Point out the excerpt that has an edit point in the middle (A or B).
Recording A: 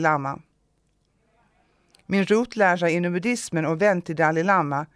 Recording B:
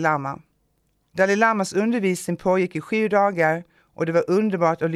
B